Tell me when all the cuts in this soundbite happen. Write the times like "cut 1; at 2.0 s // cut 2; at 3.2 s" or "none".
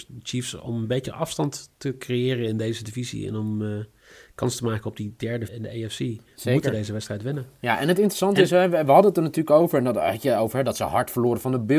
cut 1; at 5.5 s